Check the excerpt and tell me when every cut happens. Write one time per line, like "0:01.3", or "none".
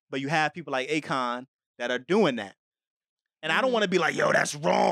none

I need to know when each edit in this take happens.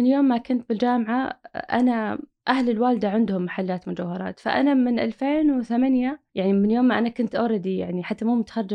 0:06.3

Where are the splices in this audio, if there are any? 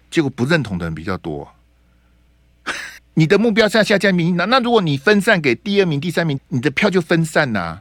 0:03.0
0:06.4

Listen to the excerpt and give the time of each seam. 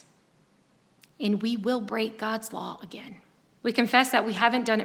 0:03.6

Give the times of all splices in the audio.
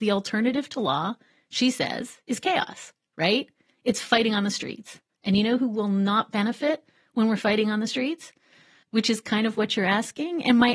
0:08.8

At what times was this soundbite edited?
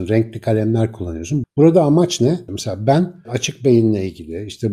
0:01.4
0:02.5

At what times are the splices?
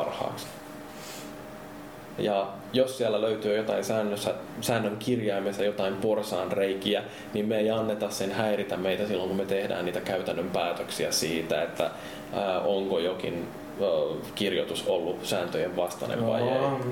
0:02.2

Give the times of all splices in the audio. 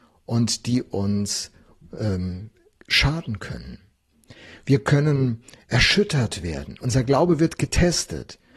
none

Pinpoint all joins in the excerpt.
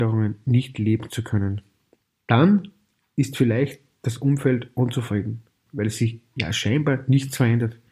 0:02.2
0:05.7

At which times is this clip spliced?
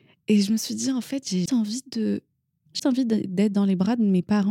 0:01.5
0:02.8

